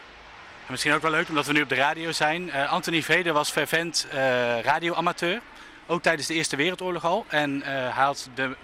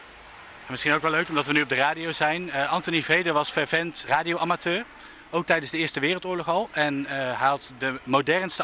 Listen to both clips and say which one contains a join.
second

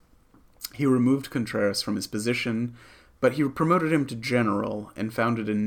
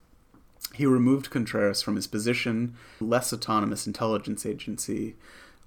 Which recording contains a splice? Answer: second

